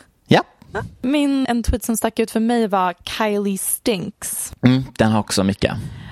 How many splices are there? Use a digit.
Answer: 1